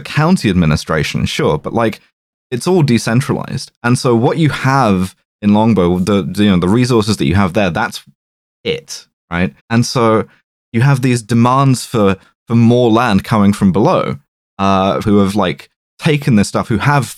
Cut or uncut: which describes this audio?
cut